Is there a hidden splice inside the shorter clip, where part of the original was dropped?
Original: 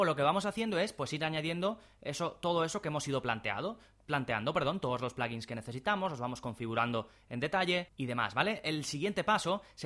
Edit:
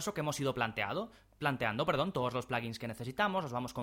no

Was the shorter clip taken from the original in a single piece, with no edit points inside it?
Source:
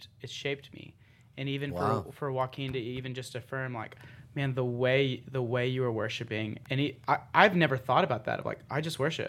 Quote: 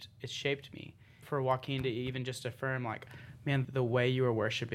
no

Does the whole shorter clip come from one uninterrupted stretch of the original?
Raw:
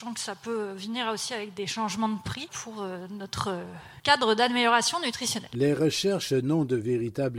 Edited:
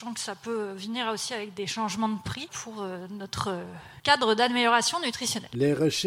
yes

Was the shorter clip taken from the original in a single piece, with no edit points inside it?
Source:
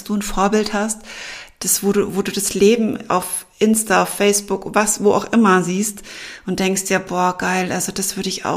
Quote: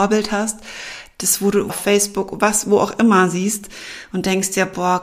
no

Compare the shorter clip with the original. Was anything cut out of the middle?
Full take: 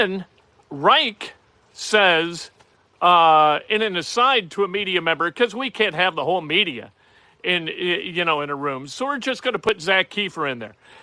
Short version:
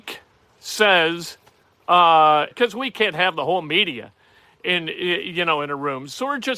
yes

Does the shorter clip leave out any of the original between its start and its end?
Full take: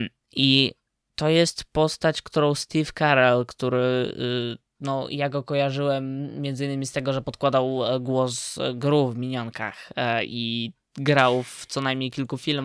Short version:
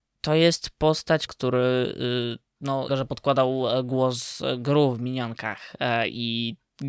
yes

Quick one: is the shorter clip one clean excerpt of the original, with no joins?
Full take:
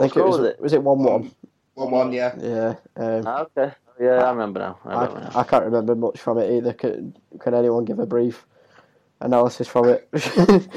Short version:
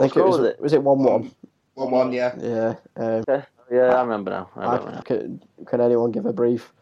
no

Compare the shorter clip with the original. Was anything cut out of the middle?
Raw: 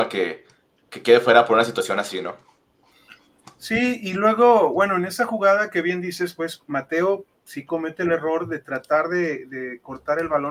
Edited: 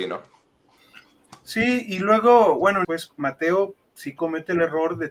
yes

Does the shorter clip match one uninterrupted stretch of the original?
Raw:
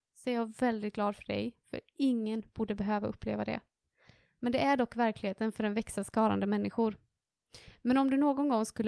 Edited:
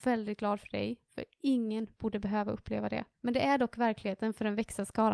no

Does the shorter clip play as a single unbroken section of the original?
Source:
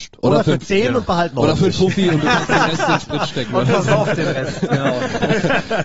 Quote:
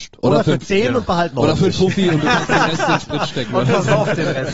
yes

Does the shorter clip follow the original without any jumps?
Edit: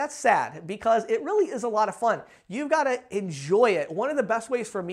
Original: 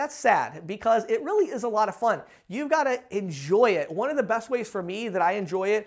yes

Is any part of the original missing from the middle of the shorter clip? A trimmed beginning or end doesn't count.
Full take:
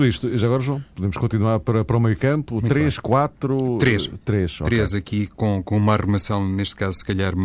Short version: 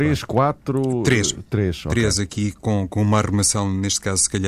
no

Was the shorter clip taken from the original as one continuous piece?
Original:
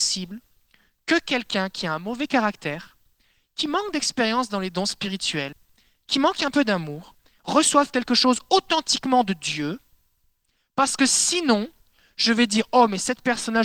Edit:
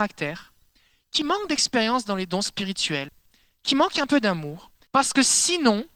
no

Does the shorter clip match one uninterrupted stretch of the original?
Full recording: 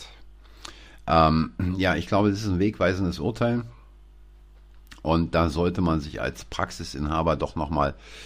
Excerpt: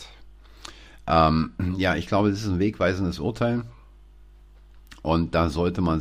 yes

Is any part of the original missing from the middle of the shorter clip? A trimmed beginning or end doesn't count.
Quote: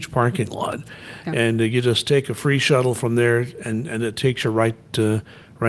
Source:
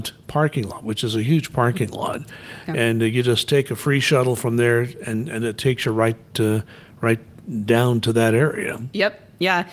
no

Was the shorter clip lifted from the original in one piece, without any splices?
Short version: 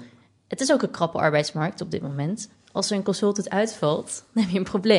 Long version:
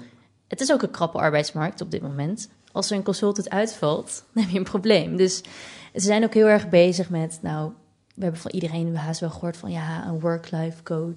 yes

